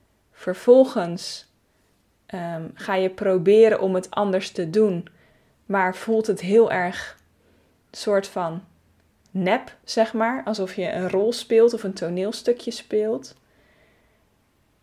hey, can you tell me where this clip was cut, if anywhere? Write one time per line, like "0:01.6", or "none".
0:09.2